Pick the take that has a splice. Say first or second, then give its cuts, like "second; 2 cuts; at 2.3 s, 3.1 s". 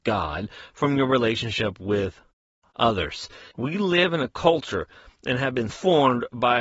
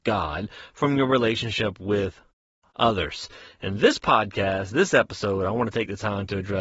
first; 2 cuts; at 3.5 s, 5.7 s